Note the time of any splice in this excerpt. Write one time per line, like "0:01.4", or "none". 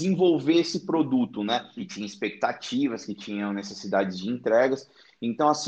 0:01.8